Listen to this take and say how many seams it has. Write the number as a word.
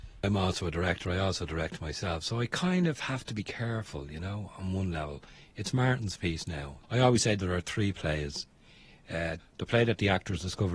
two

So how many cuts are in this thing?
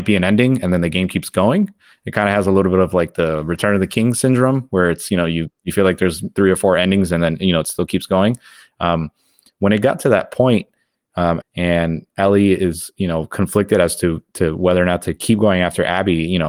one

